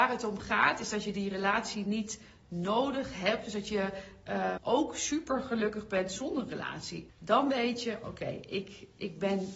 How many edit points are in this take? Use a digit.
2